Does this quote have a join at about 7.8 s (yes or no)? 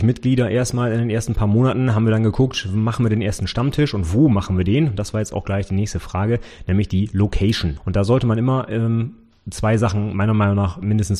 yes